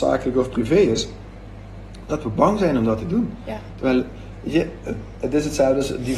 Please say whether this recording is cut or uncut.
uncut